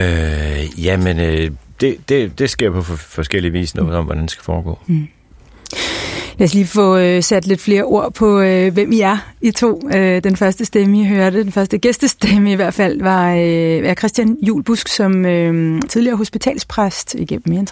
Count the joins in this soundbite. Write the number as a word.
two